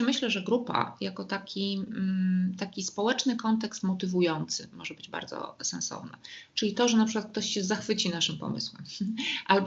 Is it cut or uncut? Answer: uncut